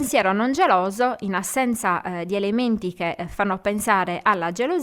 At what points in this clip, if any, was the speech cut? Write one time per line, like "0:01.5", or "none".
none